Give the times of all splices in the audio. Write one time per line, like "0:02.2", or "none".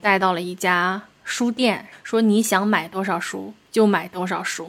0:01.9